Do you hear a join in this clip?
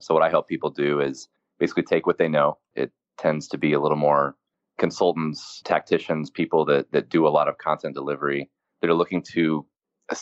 yes; 2 cuts; at 2.7 s, 5.6 s

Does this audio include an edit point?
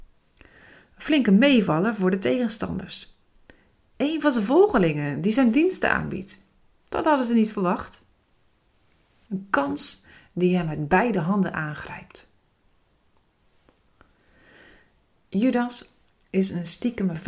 yes; 1 cut; at 9.2 s

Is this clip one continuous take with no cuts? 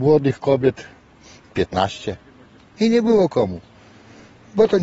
yes; 0 cuts

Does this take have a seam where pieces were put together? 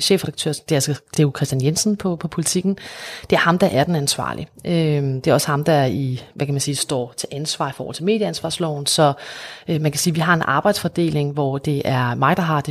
no; 0 cuts

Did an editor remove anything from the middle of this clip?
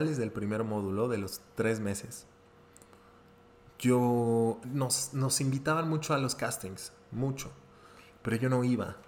no; 0 cuts

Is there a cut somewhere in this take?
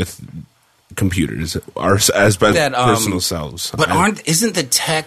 yes; 1 cut; at 2.5 s

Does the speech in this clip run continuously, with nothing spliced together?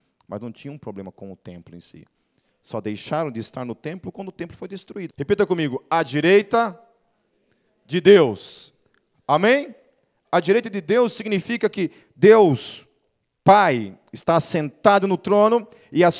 no; 1 cut; at 5.1 s

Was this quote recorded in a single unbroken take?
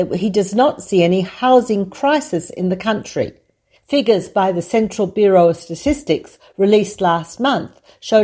no; 1 cut; at 3.8 s

